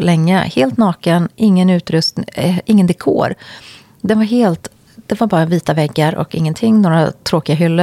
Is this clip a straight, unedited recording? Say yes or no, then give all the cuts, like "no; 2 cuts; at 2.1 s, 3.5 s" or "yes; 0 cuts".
yes; 0 cuts